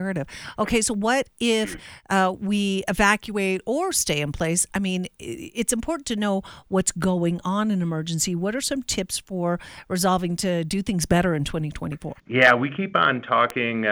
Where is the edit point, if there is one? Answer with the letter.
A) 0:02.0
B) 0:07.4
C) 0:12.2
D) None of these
C